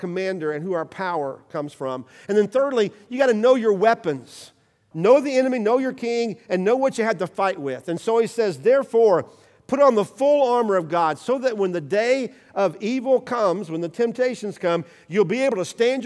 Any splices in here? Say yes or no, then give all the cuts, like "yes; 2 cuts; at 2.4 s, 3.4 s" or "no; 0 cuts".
yes; 1 cut; at 4.9 s